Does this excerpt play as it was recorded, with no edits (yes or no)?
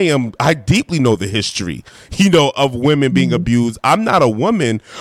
yes